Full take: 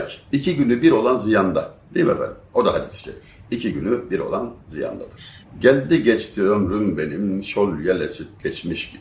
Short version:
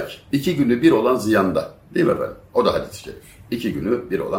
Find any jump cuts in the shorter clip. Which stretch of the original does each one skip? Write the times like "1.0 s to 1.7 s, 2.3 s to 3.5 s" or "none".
none